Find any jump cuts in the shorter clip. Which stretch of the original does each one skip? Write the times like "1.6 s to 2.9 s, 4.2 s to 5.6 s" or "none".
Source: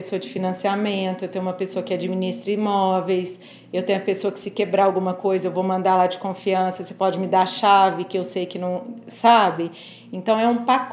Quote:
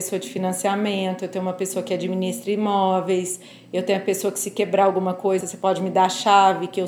5.4 s to 6.8 s